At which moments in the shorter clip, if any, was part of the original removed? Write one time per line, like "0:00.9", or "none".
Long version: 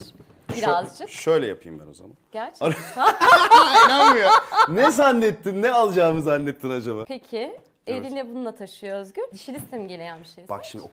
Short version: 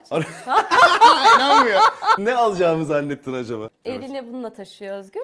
0:02.2
0:03.7